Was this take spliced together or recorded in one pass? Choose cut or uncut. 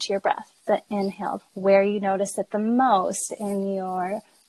cut